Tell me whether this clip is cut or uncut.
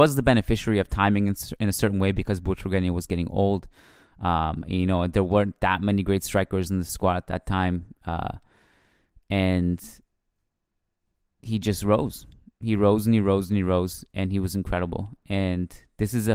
uncut